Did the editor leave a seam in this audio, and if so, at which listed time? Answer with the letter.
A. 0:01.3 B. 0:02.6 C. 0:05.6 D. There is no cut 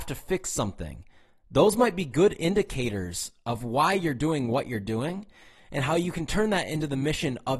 D